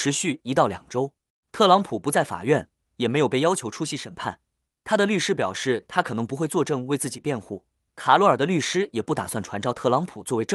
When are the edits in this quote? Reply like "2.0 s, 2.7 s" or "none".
none